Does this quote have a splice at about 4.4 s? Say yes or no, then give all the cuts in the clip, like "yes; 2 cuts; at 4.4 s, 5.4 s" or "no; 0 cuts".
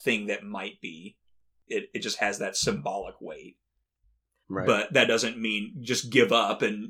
yes; 2 cuts; at 1.7 s, 4.4 s